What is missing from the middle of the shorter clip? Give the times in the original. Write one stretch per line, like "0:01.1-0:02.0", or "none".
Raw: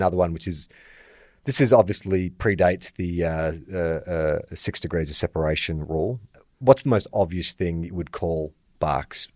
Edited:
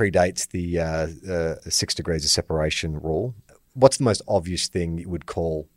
0:04.0-0:04.5